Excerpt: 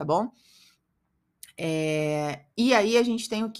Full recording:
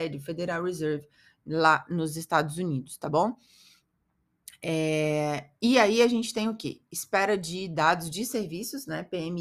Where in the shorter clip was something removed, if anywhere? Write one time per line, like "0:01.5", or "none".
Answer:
none